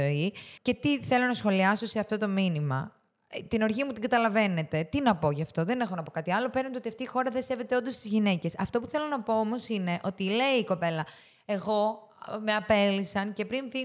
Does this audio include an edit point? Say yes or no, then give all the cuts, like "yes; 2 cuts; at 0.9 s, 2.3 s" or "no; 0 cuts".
no; 0 cuts